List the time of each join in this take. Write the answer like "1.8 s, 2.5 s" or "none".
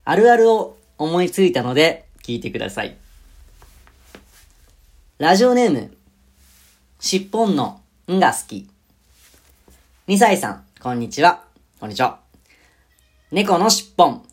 5.1 s